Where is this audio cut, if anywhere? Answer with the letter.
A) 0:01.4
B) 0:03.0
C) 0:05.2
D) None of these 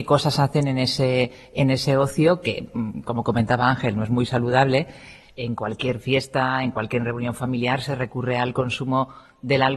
C